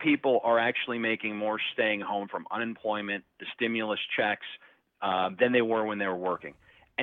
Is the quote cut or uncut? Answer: uncut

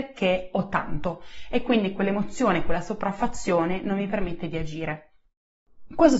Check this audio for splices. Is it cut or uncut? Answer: uncut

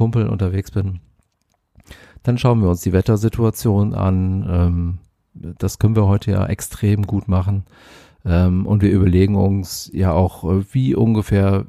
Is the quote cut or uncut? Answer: uncut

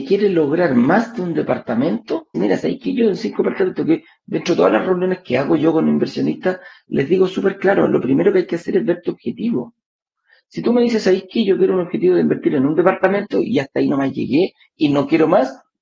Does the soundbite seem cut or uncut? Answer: cut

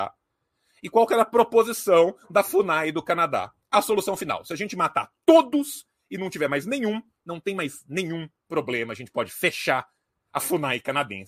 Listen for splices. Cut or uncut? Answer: uncut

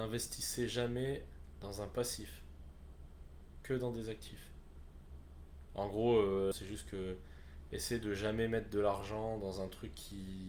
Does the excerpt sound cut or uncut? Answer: cut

